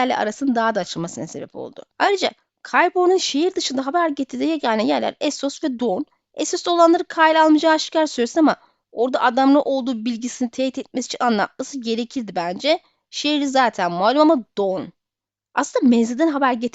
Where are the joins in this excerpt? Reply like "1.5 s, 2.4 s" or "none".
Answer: 1.9 s